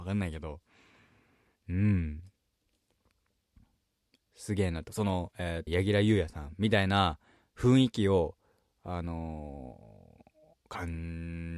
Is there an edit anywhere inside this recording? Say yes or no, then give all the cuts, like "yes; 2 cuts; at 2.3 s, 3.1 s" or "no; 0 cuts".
yes; 1 cut; at 5.7 s